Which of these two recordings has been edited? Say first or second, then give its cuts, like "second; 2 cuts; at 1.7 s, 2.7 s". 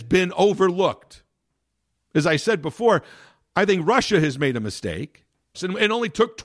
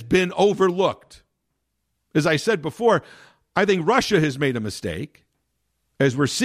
first; 1 cut; at 5.5 s